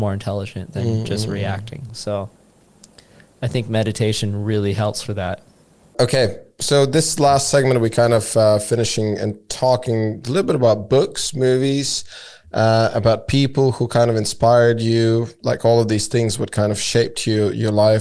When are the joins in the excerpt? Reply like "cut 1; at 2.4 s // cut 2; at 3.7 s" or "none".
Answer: none